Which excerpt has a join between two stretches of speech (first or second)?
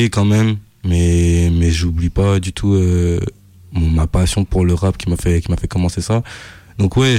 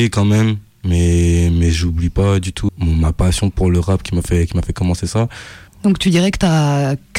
second